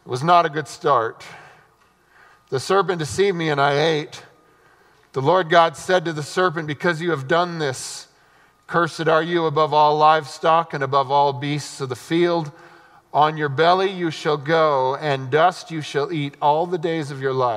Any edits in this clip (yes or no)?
no